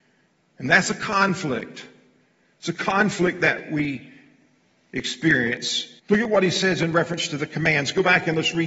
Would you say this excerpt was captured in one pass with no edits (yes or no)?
no